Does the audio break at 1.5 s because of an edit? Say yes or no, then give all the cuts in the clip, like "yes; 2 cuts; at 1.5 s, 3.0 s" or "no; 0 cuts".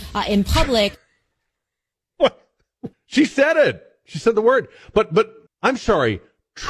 no; 2 cuts; at 2.9 s, 5.5 s